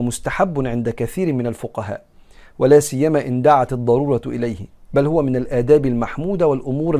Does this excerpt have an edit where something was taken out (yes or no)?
no